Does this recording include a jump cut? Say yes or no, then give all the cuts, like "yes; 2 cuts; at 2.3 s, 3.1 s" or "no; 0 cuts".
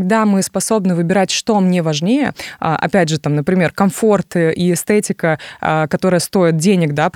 no; 0 cuts